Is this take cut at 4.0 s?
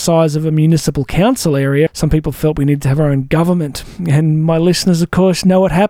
no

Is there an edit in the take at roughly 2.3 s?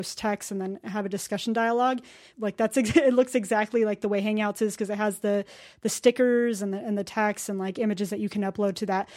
yes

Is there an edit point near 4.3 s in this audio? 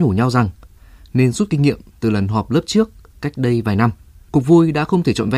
yes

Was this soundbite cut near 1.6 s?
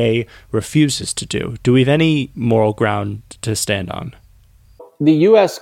no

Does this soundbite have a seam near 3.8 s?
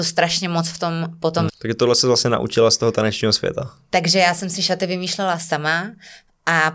no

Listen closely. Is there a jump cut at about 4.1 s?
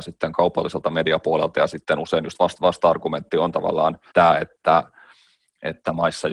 yes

